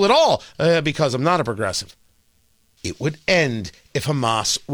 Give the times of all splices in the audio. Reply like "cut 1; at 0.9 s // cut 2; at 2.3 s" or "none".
cut 1; at 2.8 s